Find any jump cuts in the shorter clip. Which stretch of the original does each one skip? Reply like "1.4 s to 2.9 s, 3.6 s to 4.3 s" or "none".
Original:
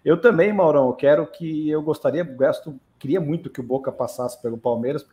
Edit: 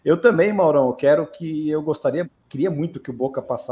2.2 s to 2.7 s